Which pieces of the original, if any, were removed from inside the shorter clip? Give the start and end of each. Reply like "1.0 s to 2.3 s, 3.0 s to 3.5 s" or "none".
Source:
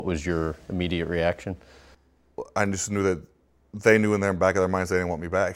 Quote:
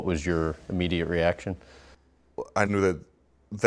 2.7 s to 2.9 s